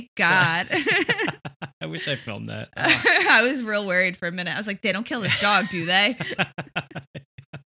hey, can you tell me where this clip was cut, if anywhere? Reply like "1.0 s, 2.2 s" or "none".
none

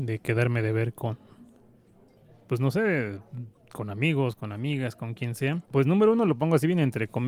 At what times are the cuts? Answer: 5.6 s

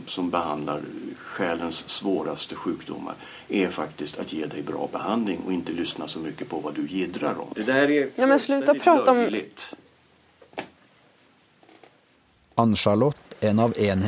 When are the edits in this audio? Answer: 7.5 s

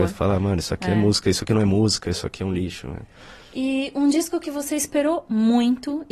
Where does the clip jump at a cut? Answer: none

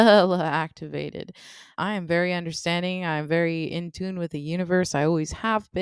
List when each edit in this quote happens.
1.7 s

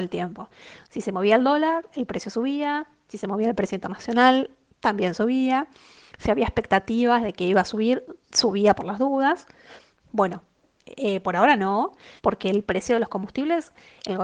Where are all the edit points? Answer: 9.9 s, 12.2 s

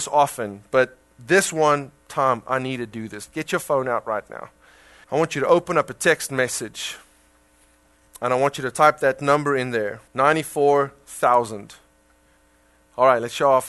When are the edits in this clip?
5.0 s, 10.1 s

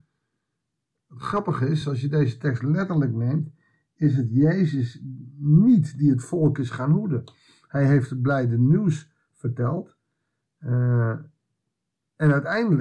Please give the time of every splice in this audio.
none

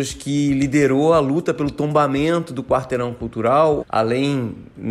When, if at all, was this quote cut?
3.8 s

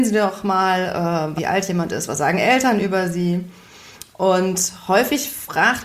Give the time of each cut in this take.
1.4 s

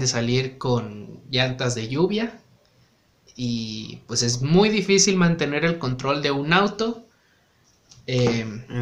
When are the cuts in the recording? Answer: none

